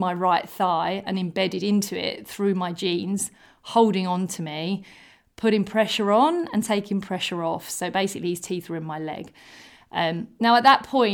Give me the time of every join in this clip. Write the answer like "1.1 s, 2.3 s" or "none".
none